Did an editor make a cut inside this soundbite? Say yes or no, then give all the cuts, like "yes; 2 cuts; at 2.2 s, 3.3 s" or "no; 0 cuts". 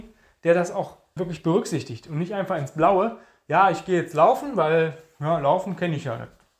yes; 1 cut; at 1.2 s